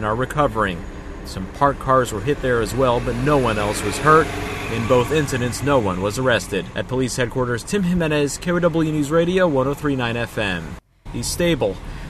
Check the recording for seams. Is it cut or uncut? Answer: cut